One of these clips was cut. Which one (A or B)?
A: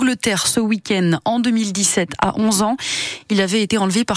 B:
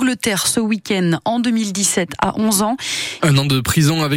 B